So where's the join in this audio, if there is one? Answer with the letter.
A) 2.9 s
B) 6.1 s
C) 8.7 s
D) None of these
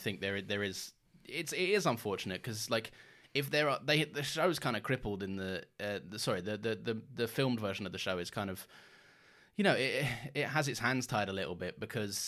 D